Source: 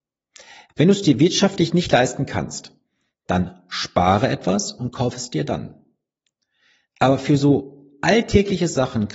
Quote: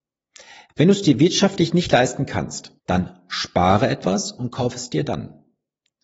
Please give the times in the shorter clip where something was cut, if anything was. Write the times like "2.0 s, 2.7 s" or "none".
2.8 s